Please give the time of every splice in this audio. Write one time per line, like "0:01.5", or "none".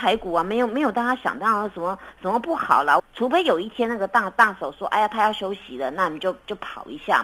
0:03.0